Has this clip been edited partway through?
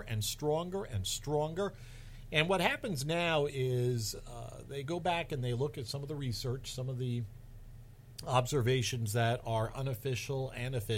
no; 0 cuts

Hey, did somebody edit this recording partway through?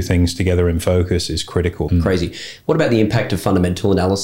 yes; 1 cut; at 1.9 s

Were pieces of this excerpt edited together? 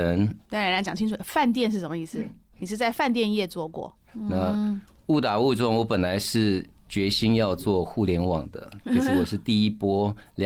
yes; 1 cut; at 4.0 s

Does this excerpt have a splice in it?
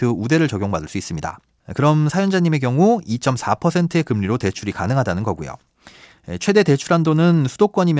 no; 0 cuts

